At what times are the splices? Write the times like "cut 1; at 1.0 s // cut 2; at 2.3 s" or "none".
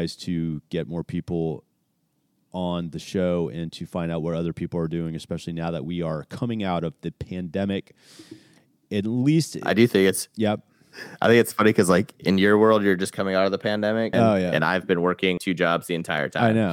cut 1; at 14.1 s // cut 2; at 15.4 s

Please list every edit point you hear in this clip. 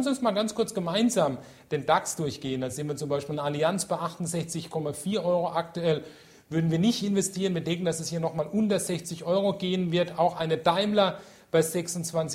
none

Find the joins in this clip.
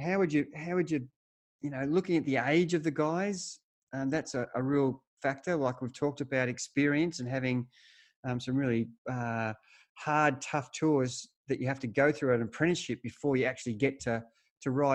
none

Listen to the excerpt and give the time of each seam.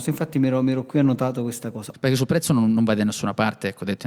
cut 1; at 1.9 s

